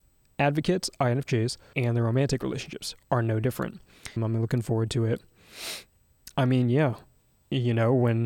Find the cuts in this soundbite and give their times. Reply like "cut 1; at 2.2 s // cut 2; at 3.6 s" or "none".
cut 1; at 1.7 s // cut 2; at 4.2 s // cut 3; at 6.3 s